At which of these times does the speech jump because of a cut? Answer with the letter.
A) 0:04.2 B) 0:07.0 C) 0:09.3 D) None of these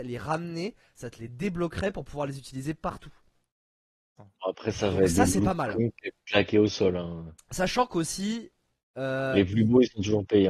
A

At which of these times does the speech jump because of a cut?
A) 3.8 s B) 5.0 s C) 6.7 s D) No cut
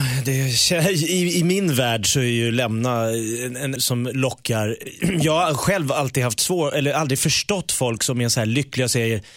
A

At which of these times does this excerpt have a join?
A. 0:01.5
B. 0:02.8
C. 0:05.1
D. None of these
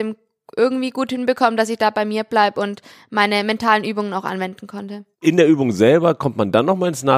C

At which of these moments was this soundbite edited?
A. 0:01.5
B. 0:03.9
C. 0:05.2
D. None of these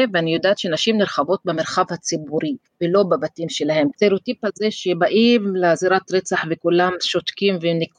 B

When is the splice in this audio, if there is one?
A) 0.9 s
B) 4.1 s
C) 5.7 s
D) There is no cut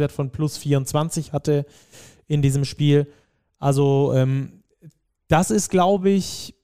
D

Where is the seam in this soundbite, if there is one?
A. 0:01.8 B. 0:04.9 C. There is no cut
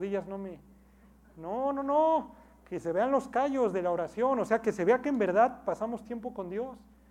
C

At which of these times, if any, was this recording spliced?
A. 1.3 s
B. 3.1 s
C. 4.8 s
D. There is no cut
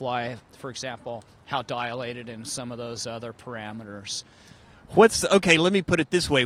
D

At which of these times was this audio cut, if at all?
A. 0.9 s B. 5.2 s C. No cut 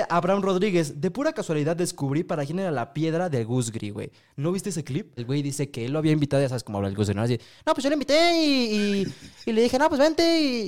B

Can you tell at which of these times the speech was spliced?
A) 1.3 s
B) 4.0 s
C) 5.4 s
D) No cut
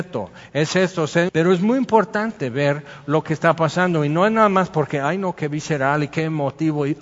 A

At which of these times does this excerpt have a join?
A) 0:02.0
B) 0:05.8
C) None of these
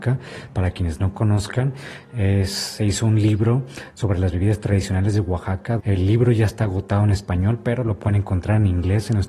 B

